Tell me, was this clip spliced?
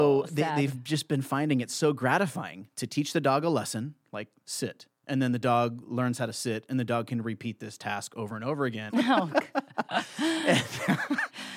yes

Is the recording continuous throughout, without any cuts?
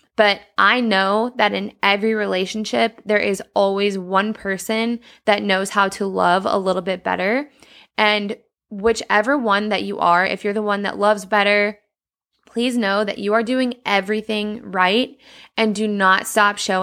yes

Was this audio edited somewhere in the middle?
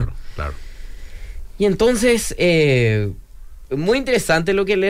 no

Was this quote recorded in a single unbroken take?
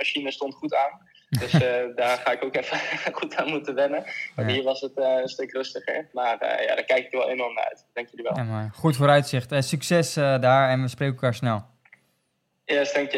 yes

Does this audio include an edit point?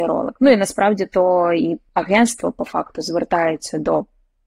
yes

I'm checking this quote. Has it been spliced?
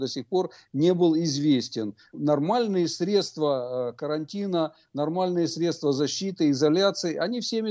yes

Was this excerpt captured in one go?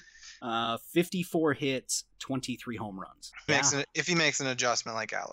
no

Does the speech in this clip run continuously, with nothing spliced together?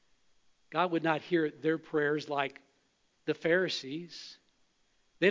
yes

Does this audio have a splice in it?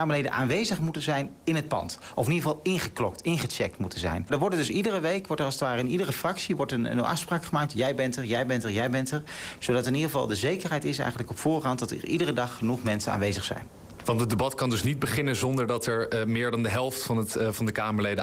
no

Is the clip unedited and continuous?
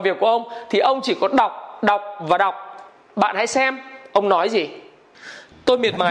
yes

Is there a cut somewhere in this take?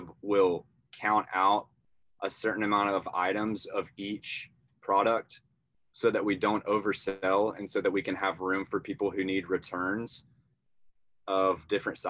no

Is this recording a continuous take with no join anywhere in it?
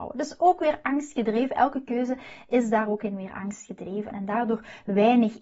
no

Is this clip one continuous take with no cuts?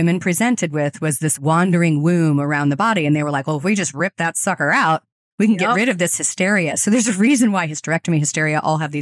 yes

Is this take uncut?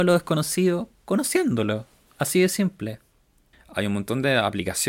no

